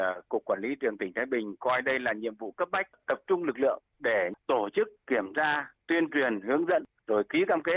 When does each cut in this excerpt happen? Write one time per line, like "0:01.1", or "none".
none